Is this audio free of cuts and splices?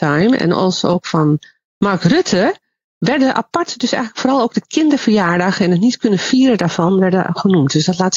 yes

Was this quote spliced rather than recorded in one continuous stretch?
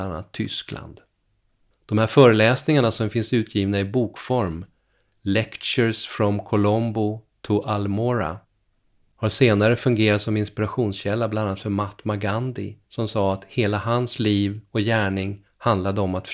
yes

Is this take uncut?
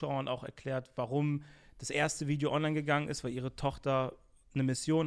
yes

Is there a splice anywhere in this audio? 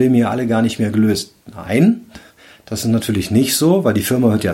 no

